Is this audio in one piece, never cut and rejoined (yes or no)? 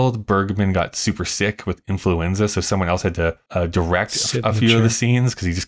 yes